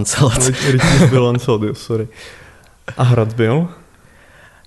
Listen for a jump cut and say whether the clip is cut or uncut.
uncut